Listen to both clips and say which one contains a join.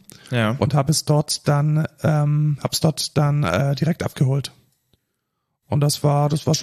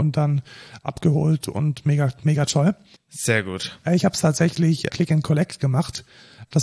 second; 2 cuts; at 3.0 s, 4.9 s

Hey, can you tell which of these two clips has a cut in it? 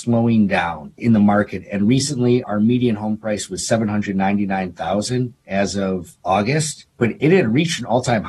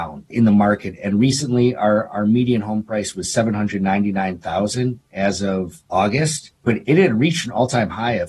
first; 1 cut; at 2.4 s

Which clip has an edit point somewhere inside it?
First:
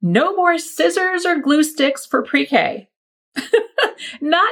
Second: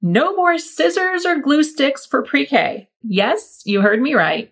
second; 1 cut; at 3.0 s

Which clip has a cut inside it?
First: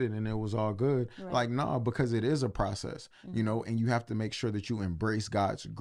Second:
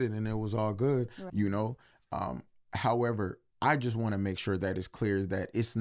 second; 2 cuts; at 1.3 s, 3.5 s

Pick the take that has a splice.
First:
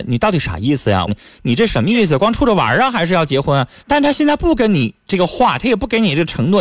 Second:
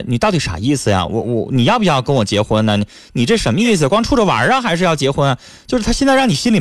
first; 2 cuts; at 1.1 s, 3.8 s

